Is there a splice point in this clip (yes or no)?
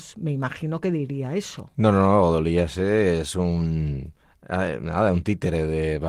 no